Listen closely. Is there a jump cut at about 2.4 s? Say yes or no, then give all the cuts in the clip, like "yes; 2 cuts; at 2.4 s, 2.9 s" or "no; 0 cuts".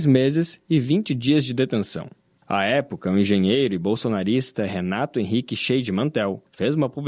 yes; 1 cut; at 2.4 s